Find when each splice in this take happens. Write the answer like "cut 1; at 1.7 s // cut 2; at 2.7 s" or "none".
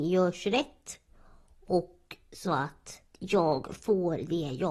cut 1; at 3.1 s